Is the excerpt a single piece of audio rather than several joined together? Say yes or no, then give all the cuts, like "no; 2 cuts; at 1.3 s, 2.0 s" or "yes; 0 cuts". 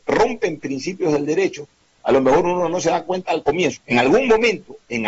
no; 1 cut; at 3.8 s